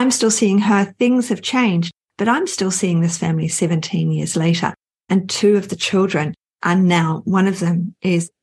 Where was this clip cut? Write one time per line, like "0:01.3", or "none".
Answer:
none